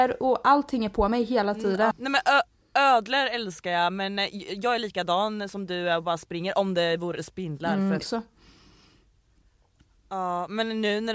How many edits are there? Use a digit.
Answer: 2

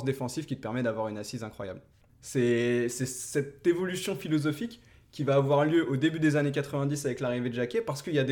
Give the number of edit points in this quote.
1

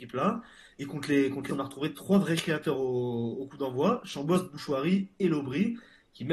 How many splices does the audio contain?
1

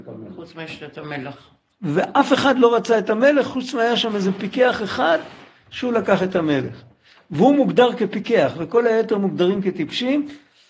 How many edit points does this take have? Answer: 0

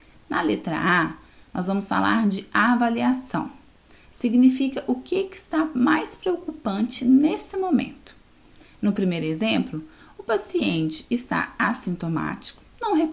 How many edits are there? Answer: 0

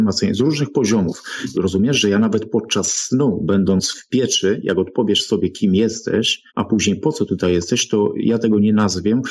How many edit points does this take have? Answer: 2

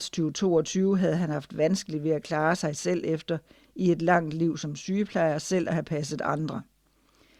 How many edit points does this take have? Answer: 0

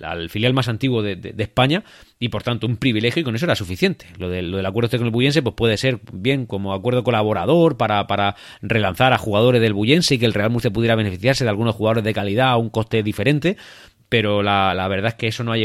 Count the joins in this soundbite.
0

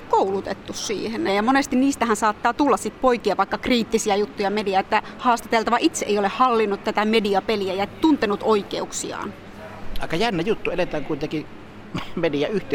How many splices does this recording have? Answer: 1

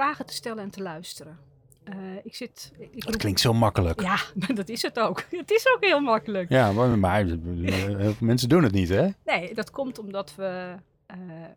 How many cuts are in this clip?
0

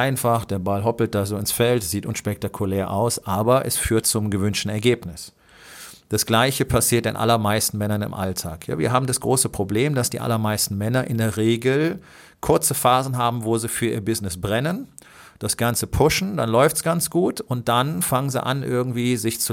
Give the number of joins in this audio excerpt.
1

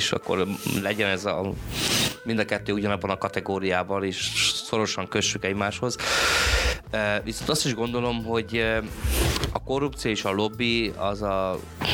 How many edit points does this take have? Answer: 0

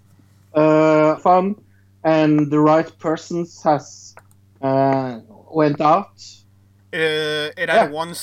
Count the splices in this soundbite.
2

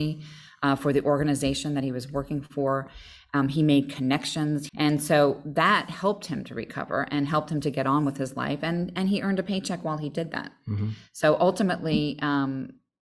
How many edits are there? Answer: 1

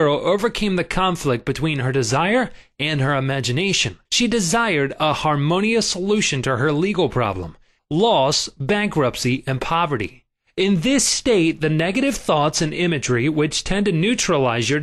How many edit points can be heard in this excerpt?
3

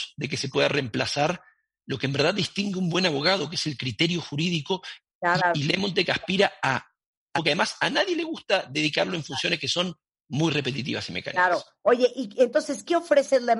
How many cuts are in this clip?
2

